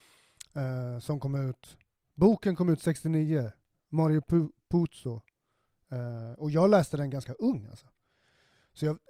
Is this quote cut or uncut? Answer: uncut